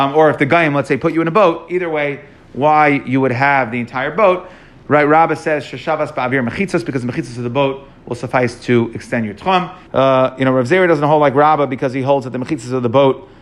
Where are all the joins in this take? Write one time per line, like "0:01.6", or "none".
0:09.9